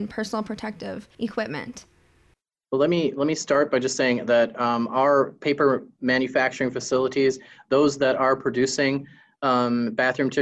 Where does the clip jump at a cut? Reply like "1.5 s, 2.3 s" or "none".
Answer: none